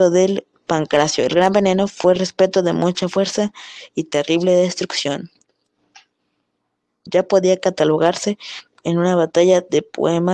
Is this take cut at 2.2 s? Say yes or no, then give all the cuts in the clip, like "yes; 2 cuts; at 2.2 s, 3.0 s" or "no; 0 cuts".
yes; 2 cuts; at 2.2 s, 7.1 s